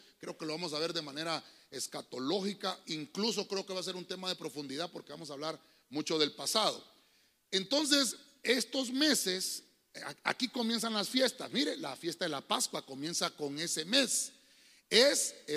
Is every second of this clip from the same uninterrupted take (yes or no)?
yes